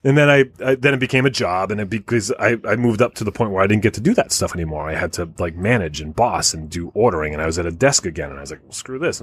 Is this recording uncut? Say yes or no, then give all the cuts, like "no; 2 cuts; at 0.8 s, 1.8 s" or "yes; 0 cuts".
yes; 0 cuts